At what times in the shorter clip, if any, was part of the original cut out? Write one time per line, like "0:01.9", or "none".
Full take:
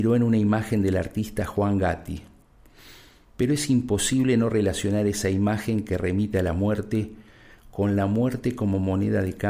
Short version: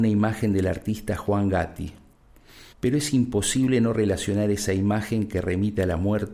0:02.7